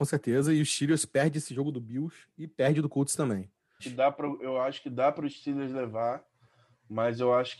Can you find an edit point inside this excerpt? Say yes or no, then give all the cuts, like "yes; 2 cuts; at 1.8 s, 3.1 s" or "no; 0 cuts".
yes; 1 cut; at 3.8 s